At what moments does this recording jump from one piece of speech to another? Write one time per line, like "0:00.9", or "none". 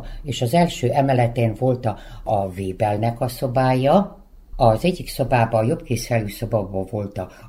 none